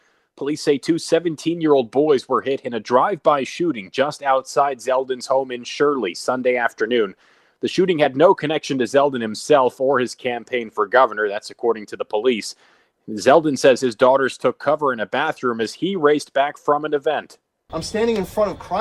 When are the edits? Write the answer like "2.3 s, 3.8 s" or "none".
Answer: 17.7 s